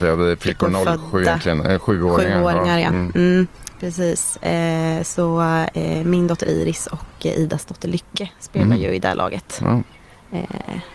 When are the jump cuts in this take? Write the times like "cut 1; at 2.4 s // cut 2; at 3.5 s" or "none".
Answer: none